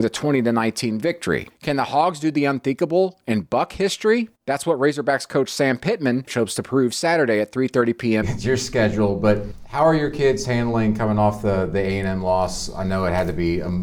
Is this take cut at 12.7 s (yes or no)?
no